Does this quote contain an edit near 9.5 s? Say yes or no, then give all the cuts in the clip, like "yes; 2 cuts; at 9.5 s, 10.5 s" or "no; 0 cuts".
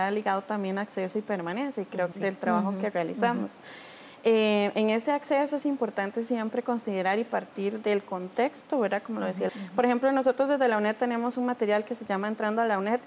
yes; 2 cuts; at 2.1 s, 9.5 s